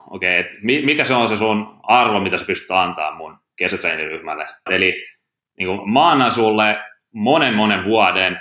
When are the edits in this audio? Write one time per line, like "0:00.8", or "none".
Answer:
0:04.7